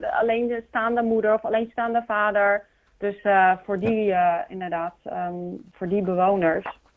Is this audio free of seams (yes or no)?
yes